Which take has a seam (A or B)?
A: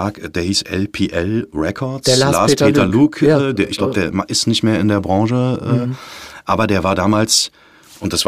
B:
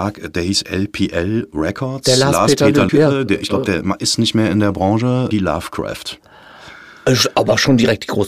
B